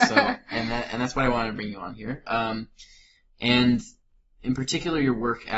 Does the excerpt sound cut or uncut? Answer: uncut